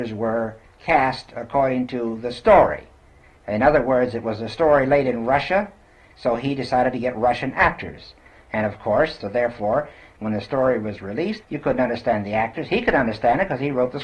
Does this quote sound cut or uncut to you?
cut